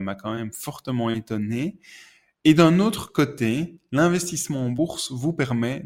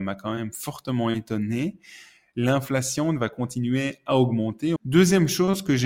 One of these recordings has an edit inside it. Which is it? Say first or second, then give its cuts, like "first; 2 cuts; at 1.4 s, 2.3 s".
second; 2 cuts; at 2.3 s, 4.8 s